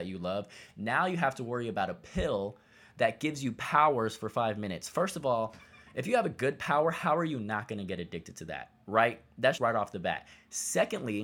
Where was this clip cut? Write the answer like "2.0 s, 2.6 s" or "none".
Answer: 9.6 s